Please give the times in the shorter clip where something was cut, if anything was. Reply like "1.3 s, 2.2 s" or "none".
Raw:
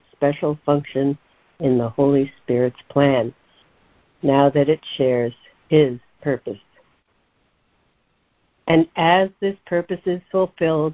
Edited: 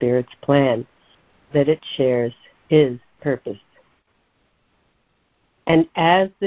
1.5 s